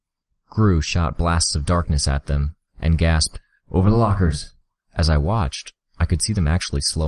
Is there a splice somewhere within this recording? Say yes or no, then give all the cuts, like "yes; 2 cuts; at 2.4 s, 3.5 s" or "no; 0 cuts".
yes; 2 cuts; at 2.7 s, 4.8 s